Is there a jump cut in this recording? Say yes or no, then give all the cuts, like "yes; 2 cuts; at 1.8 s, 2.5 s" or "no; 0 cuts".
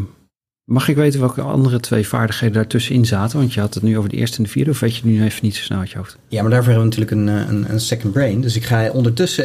no; 0 cuts